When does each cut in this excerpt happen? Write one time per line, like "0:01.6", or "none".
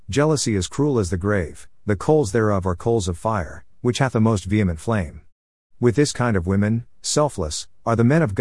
none

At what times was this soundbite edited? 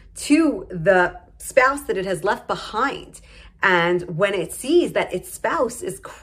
0:03.5

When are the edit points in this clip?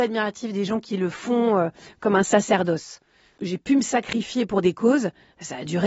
none

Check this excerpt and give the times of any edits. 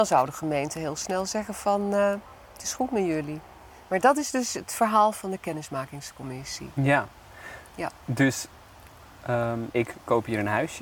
0:09.7

